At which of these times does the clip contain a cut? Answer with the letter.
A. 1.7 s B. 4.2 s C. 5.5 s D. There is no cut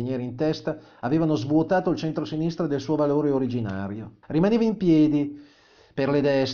B